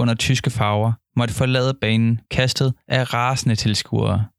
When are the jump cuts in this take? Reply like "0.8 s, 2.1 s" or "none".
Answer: 2.2 s